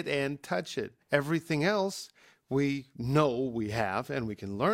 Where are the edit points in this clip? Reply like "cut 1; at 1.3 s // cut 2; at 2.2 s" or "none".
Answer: cut 1; at 1.0 s